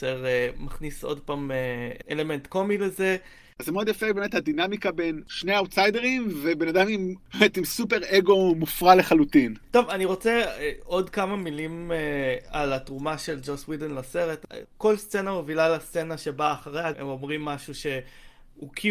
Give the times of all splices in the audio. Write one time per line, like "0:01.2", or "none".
0:03.6
0:14.6
0:16.9